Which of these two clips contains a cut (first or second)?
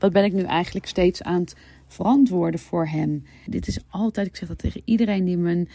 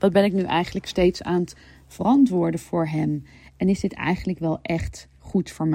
first